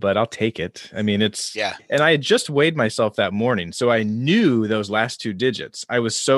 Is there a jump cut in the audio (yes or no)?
yes